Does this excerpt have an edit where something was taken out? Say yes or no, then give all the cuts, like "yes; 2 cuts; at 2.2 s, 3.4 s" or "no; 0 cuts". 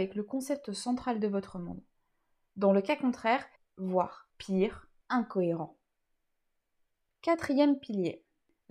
yes; 1 cut; at 3.6 s